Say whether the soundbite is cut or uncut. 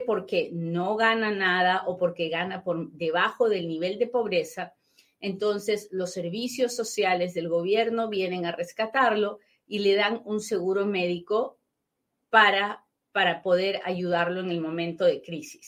uncut